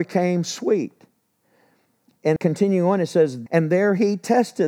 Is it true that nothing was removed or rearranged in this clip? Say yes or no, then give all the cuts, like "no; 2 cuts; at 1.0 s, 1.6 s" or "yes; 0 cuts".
no; 2 cuts; at 2.4 s, 3.5 s